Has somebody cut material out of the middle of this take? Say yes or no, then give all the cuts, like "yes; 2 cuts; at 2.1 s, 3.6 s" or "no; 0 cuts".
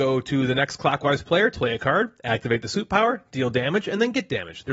yes; 1 cut; at 1.5 s